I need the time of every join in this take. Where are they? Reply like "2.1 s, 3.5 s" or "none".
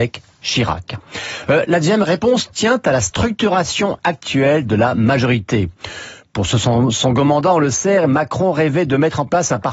none